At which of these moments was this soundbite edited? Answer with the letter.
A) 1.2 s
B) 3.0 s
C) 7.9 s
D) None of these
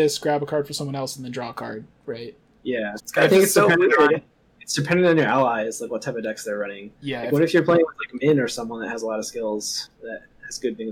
B